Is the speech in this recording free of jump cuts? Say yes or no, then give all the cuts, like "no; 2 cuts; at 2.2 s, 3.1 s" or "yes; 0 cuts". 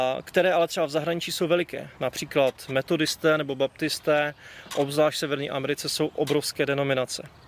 yes; 0 cuts